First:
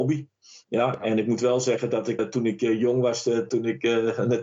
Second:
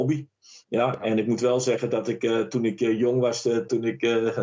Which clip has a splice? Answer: first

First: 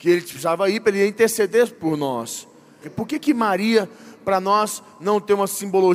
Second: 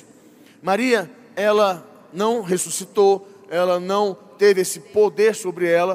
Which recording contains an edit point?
first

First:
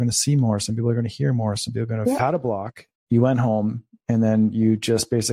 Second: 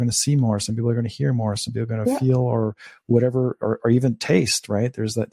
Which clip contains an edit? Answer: first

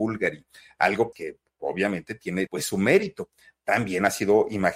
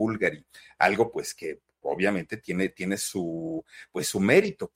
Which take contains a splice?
first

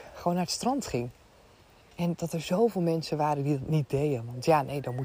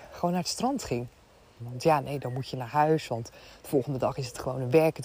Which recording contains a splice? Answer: second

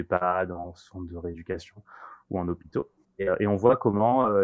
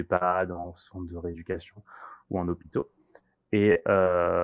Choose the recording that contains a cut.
first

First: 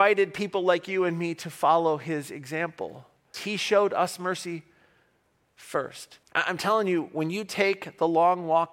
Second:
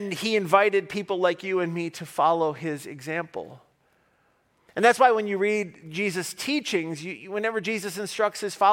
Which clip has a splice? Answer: first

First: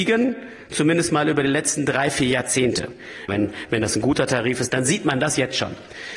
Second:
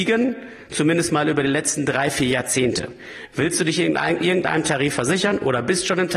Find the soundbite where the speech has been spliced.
first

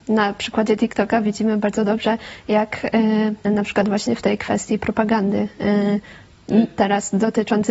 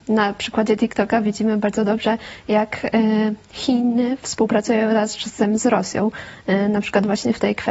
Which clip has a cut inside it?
first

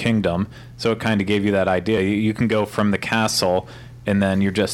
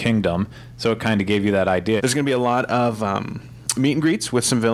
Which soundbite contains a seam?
second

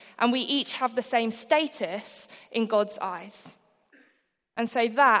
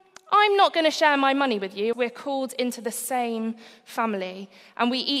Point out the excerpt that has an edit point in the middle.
second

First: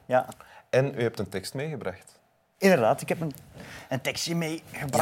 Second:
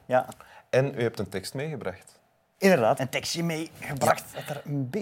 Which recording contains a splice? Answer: second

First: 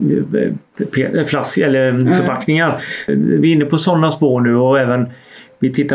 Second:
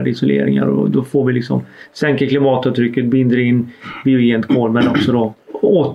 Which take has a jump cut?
first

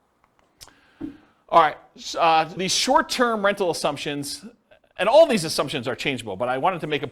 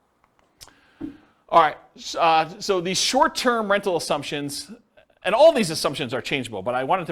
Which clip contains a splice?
first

